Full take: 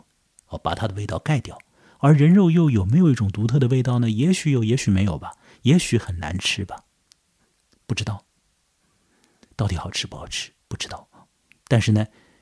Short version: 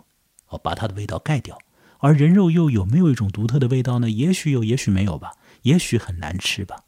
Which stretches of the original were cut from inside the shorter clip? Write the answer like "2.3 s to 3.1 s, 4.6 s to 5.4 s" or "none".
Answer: none